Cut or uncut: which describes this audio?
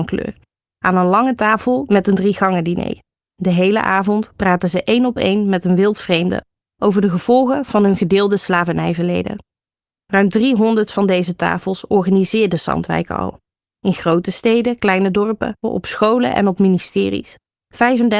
cut